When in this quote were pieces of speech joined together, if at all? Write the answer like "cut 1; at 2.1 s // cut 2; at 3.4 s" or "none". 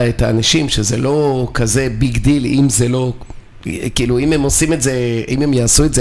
none

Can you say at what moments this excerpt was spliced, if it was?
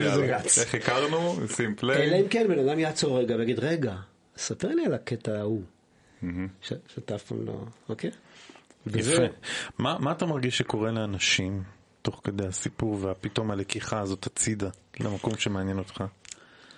none

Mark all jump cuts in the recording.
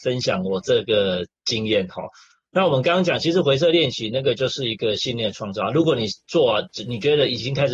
none

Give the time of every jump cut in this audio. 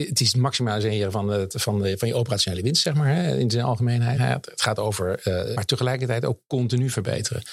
cut 1; at 4.1 s // cut 2; at 5.5 s

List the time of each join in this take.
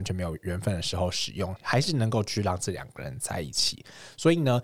cut 1; at 1.6 s

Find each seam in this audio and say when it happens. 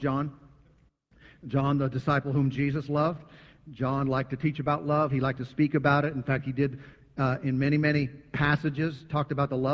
none

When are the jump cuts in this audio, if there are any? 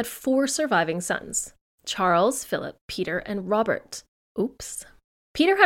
cut 1; at 4.2 s

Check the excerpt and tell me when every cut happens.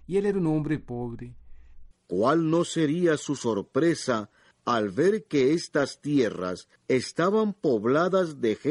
cut 1; at 1.9 s // cut 2; at 6.8 s

